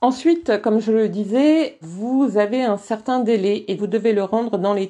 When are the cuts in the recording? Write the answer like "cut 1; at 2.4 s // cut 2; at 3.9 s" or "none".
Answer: cut 1; at 1.8 s // cut 2; at 3.8 s